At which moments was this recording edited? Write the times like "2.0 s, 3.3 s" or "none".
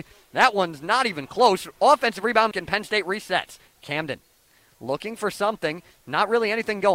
2.5 s, 3.7 s

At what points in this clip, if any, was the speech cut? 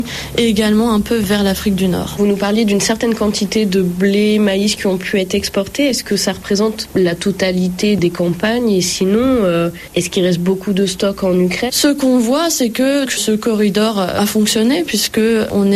11.7 s, 13.1 s

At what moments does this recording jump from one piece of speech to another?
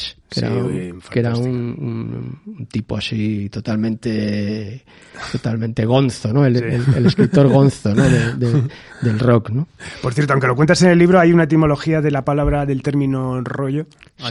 none

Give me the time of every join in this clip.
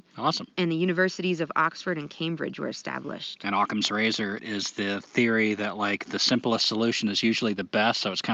4.4 s

